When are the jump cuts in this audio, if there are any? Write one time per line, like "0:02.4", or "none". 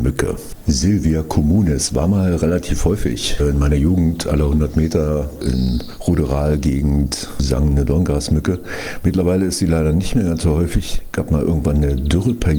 0:05.4